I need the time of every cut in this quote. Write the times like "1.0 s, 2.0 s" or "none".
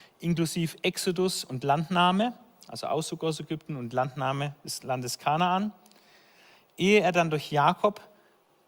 none